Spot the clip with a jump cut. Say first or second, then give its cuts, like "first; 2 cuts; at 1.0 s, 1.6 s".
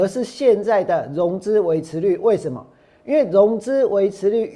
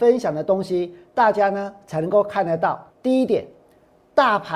second; 1 cut; at 2.9 s